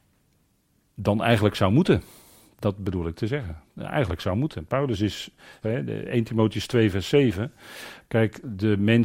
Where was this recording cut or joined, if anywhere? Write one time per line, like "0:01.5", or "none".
0:05.6
0:08.0